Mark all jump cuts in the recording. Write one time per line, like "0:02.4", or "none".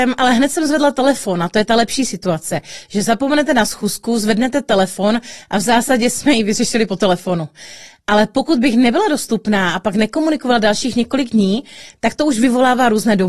none